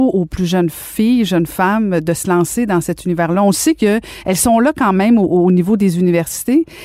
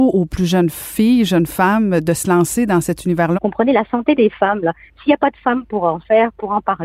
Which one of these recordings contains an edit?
second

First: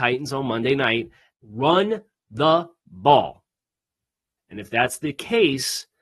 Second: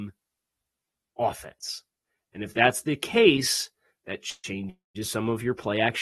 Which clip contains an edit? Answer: first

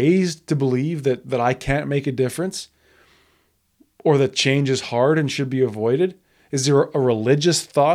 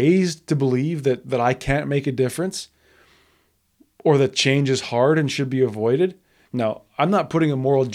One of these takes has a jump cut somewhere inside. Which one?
second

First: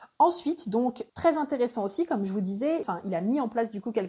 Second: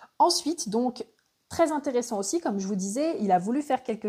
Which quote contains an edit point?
first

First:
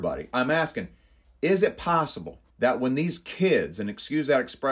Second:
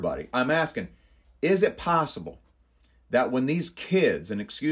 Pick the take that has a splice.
first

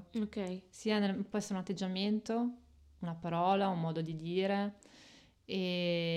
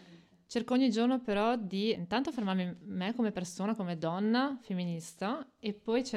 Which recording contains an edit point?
second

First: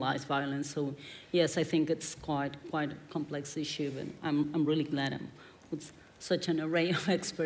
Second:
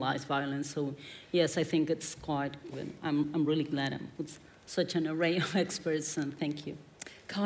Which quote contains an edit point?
second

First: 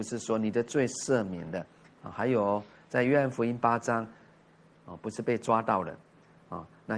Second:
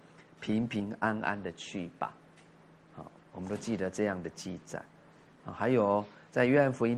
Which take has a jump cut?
first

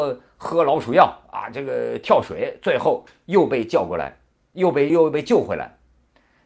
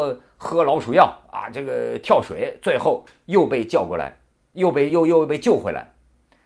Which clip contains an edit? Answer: first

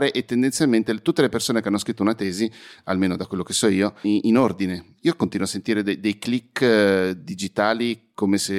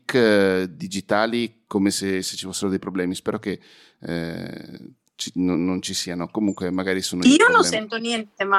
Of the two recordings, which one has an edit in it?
first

